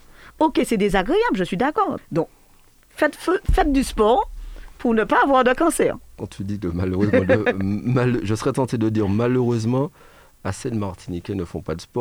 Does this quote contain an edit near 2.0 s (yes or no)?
yes